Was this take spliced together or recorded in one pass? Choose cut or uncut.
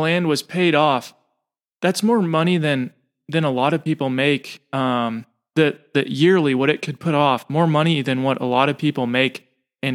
uncut